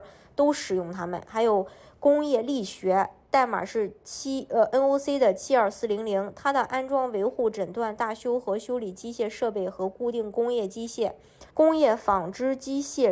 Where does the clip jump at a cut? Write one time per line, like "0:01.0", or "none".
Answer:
0:11.5